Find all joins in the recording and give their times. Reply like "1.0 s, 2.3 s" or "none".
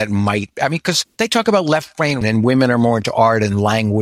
2.2 s